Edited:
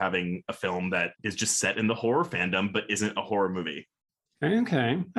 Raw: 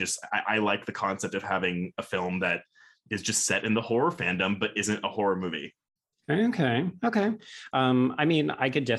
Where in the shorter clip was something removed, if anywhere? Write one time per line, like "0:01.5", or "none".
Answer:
0:01.2